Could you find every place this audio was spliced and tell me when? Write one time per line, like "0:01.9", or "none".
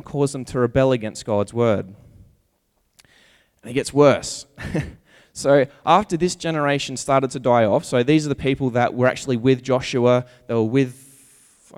none